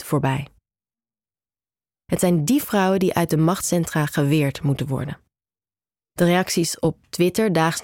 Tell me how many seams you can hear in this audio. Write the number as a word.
one